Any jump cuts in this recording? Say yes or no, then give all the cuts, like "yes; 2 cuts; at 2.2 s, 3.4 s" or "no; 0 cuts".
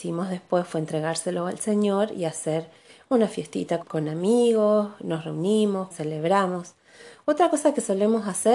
yes; 2 cuts; at 3.8 s, 5.9 s